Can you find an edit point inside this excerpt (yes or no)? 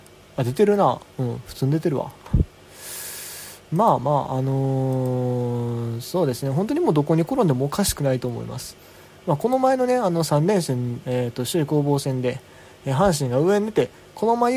yes